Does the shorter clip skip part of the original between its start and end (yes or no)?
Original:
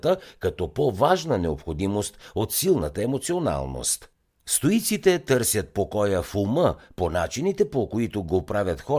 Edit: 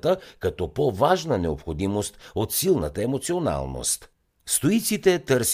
no